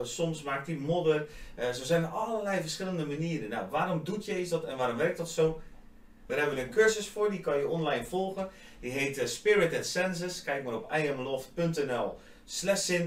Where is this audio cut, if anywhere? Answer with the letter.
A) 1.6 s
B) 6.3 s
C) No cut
B